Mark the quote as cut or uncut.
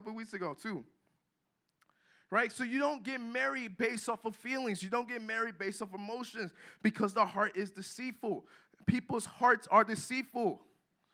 uncut